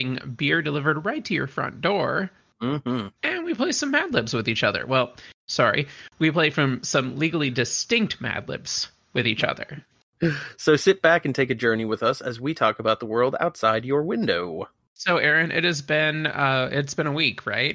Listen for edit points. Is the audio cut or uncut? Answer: uncut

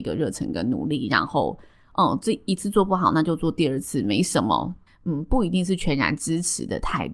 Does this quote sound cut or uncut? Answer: cut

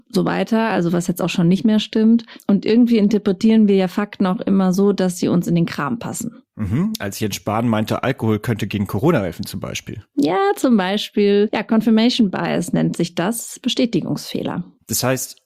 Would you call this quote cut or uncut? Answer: uncut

